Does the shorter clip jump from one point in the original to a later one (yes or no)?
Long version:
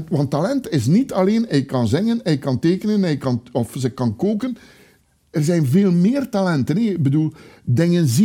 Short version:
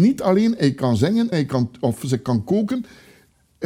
yes